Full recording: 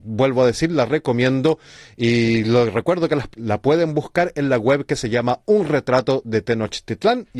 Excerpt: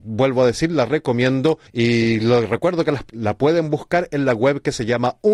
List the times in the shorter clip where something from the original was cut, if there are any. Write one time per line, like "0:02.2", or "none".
0:01.7